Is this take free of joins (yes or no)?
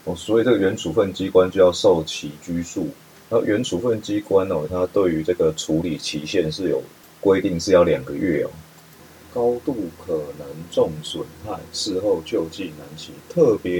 no